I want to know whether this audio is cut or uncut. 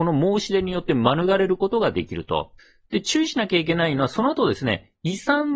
uncut